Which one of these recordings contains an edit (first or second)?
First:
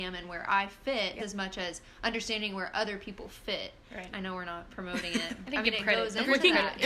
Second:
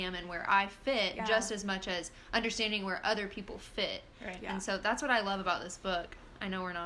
first